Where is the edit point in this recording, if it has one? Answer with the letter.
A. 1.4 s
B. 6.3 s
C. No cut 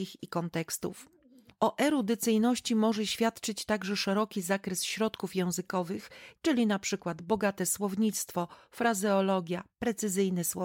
B